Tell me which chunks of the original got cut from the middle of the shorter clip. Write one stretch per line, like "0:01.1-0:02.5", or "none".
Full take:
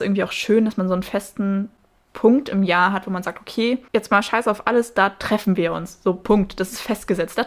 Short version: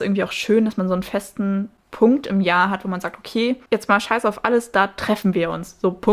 0:01.8-0:02.0